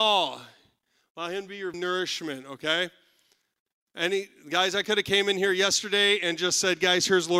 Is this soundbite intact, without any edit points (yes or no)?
no